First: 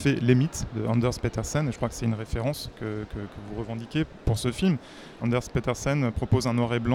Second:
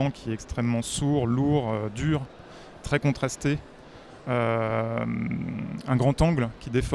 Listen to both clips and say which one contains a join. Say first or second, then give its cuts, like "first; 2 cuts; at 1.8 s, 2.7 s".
first; 1 cut; at 5.2 s